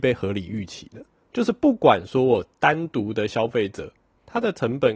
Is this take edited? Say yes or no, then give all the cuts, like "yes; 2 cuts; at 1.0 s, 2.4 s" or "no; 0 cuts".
yes; 1 cut; at 1.3 s